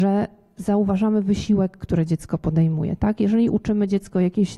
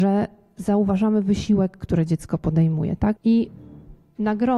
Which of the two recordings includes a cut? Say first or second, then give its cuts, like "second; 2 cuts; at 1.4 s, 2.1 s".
second; 1 cut; at 3.2 s